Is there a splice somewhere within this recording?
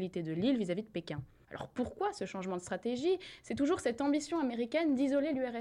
yes; 1 cut; at 1.4 s

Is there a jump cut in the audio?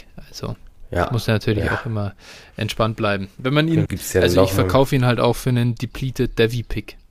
yes; 1 cut; at 3.9 s

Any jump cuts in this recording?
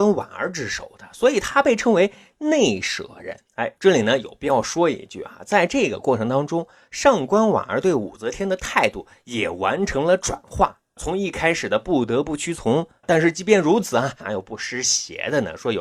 yes; 3 cuts; at 3.5 s, 13.0 s, 14.2 s

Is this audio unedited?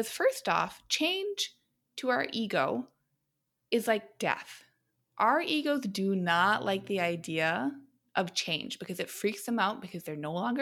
yes; 0 cuts

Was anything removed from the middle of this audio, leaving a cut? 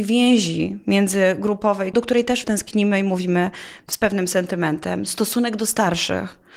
no; 0 cuts

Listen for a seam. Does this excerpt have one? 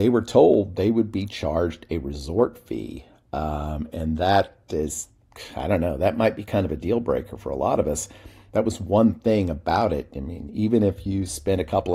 no; 0 cuts

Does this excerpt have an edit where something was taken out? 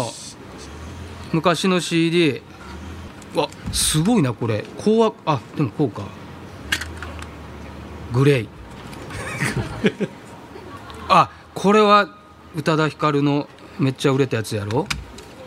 no; 0 cuts

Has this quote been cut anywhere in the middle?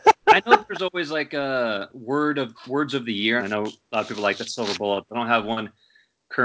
yes; 1 cut; at 3.4 s

